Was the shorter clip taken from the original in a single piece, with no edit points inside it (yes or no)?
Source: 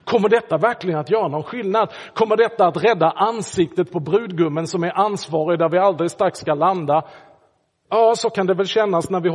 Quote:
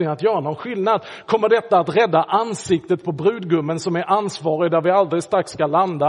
yes